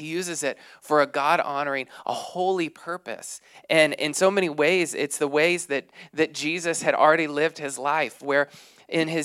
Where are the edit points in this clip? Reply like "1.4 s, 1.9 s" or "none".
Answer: none